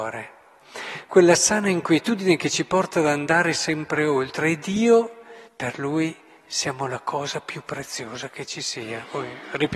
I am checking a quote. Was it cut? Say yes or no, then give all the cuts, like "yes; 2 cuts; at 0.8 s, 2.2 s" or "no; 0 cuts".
yes; 1 cut; at 5.5 s